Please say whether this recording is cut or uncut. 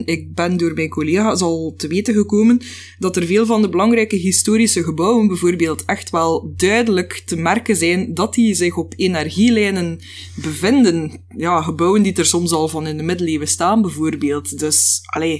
uncut